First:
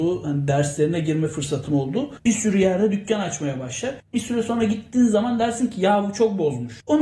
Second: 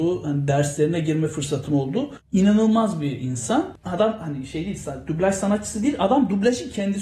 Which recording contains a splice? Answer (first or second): first